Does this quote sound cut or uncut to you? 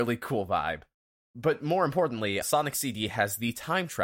cut